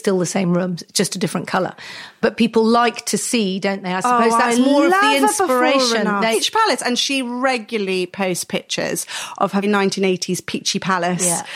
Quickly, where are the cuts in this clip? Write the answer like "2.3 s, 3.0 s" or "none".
6.3 s, 9.6 s